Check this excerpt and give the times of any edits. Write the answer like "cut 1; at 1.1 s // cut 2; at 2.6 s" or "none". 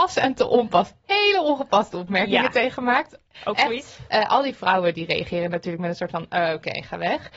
cut 1; at 4.1 s